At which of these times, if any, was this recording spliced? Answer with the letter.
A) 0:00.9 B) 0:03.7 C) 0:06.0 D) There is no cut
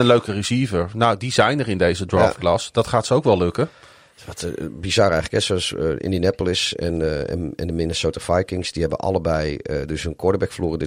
D